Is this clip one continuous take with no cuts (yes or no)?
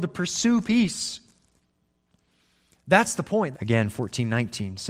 no